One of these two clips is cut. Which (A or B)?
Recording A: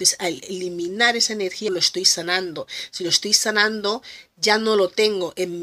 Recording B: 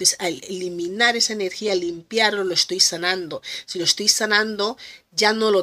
A